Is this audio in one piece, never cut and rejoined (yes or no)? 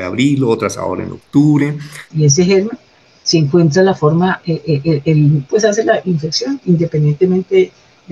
no